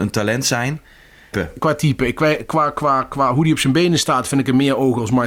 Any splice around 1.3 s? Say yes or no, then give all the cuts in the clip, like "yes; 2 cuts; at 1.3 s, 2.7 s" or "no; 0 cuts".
yes; 1 cut; at 1.3 s